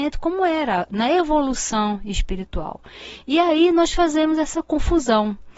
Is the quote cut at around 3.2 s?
yes; 1 cut; at 3.2 s

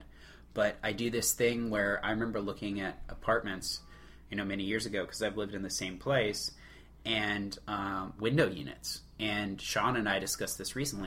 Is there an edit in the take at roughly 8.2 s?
yes; 1 cut; at 8.2 s

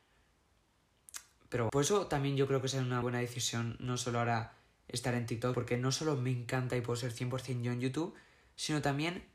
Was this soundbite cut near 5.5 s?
yes; 3 cuts; at 1.7 s, 3.0 s, 5.5 s

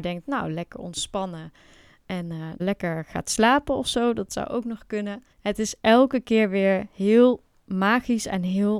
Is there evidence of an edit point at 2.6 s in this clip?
yes; 2 cuts; at 2.6 s, 5.3 s

